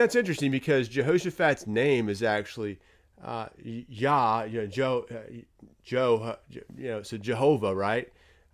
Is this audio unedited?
yes; 0 cuts

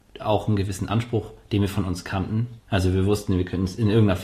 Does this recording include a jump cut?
yes; 1 cut; at 2.6 s

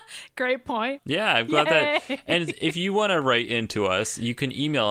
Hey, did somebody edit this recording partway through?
yes; 1 cut; at 1.0 s

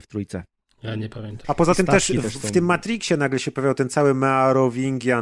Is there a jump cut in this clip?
yes; 1 cut; at 1.4 s

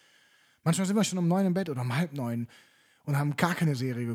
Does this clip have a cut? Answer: no; 0 cuts

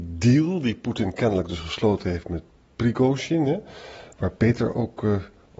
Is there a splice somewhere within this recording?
no; 0 cuts

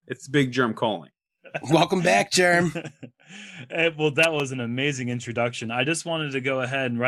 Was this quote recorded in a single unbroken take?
yes; 0 cuts

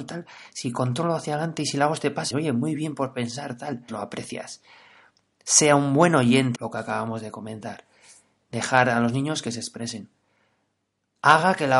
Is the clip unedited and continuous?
no; 3 cuts; at 2.3 s, 3.9 s, 6.6 s

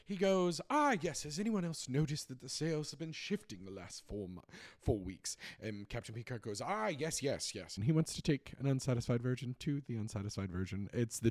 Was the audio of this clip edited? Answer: yes; 1 cut; at 7.8 s

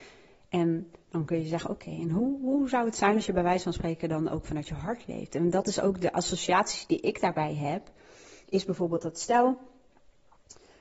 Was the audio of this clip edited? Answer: no; 0 cuts

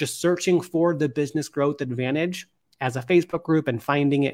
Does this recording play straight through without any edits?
yes; 0 cuts

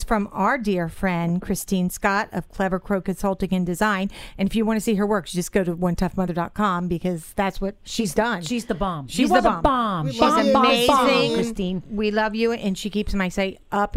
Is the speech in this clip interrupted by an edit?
no; 0 cuts

